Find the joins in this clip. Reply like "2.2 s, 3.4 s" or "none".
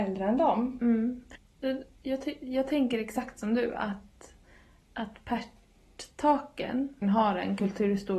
4.8 s, 7.0 s